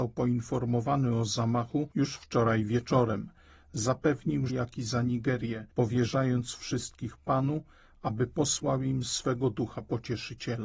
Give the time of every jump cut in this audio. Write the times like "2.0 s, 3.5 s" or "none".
4.5 s